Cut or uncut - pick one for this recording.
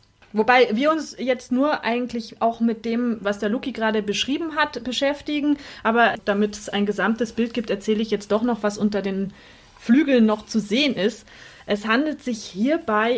uncut